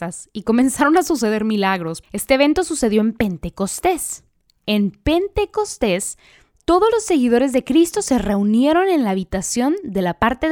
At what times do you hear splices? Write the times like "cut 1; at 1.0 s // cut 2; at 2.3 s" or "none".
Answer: cut 1; at 2.0 s